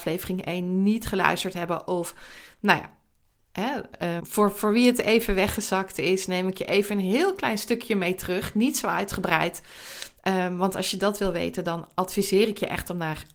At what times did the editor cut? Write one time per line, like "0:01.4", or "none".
0:04.2